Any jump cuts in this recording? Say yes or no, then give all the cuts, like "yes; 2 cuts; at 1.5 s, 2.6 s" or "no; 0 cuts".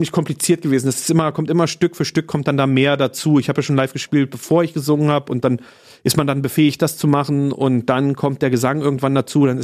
no; 0 cuts